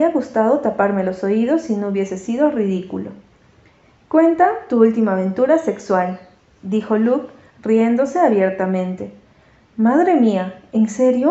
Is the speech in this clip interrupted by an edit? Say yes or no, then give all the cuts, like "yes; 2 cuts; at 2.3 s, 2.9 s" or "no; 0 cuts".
no; 0 cuts